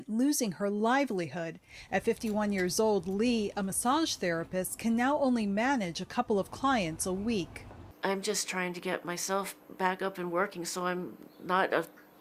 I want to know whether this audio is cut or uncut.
uncut